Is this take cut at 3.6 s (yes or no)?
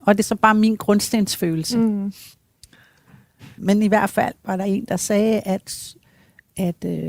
yes